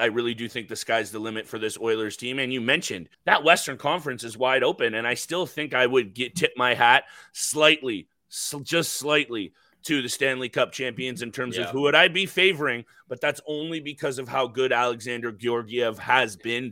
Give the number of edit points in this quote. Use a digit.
1